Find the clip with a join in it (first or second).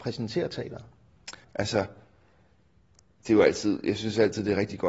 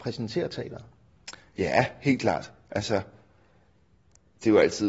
first